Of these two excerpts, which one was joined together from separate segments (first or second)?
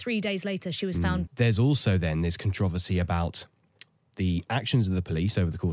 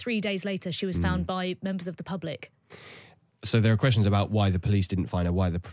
first